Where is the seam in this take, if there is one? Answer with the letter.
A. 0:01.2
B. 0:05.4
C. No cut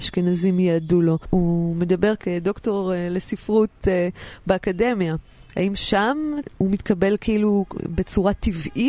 A